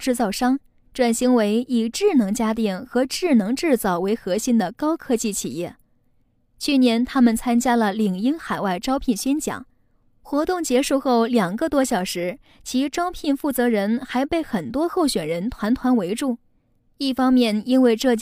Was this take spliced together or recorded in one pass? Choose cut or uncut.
uncut